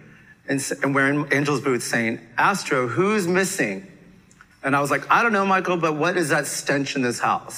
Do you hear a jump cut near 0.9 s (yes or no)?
no